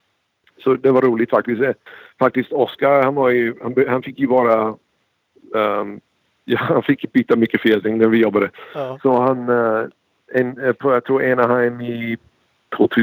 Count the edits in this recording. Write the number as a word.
zero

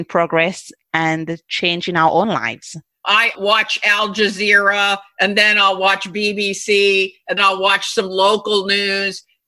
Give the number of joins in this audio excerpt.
two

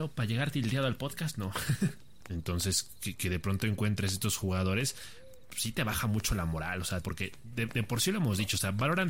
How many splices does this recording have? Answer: two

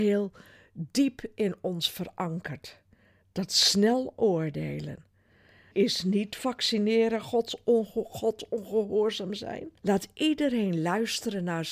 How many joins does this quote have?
two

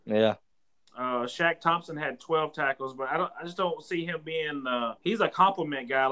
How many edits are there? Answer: one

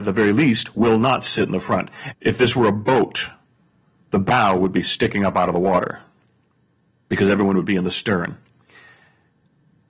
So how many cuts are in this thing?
one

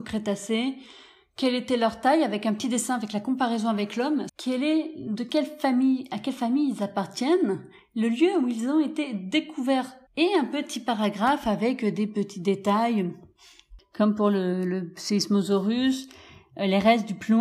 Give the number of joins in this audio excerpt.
two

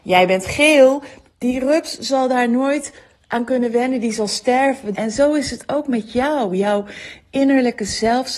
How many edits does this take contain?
two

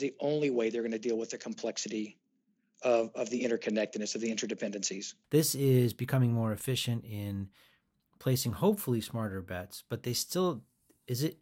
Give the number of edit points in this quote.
one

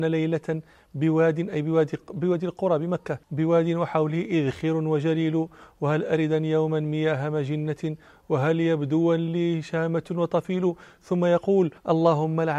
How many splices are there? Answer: one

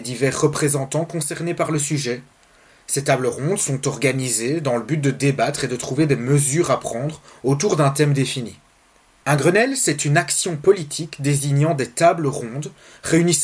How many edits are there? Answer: one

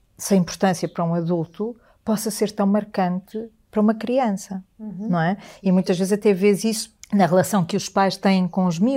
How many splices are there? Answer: one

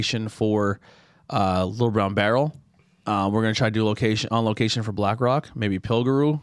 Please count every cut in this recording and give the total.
zero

